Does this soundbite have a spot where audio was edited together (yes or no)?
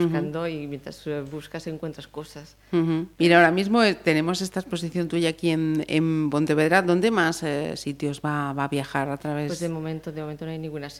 yes